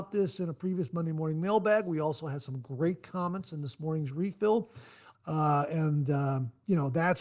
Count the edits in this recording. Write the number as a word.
one